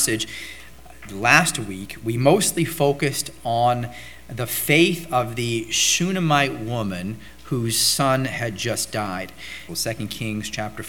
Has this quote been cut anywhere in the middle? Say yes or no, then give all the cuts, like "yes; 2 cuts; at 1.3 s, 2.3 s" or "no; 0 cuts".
yes; 1 cut; at 9.7 s